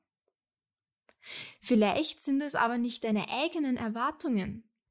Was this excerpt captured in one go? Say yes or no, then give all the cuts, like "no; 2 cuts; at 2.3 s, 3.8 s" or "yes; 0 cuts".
yes; 0 cuts